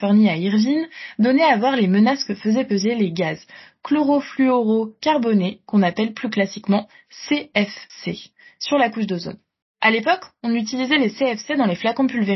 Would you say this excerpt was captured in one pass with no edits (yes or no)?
yes